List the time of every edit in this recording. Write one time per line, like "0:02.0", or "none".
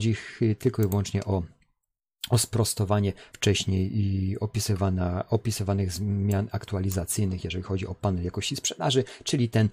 0:03.3